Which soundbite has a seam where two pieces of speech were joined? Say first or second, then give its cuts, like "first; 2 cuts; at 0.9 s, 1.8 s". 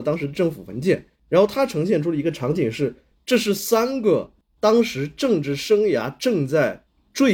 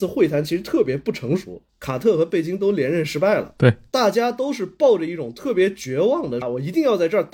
second; 2 cuts; at 1.7 s, 6.4 s